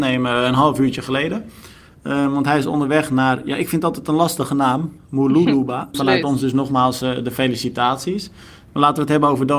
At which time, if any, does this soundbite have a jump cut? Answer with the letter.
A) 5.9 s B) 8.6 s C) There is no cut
A